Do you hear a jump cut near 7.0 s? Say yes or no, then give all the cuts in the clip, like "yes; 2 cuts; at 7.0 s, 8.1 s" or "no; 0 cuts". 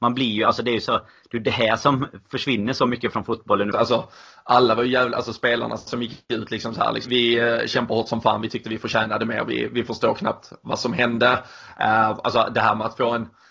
yes; 2 cuts; at 3.7 s, 7.0 s